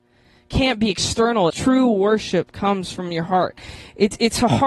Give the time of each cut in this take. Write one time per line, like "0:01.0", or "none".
0:01.5